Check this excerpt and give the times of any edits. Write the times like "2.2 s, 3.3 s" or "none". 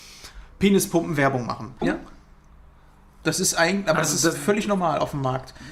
1.8 s